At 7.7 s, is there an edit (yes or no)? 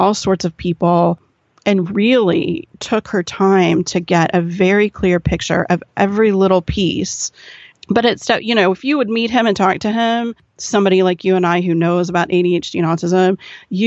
yes